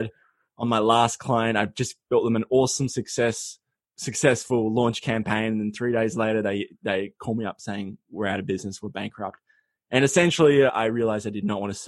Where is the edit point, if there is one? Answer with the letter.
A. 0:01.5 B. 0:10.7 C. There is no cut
B